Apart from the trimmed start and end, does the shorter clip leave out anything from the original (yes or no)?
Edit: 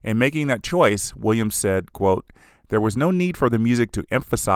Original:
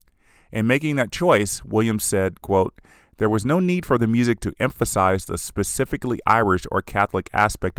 no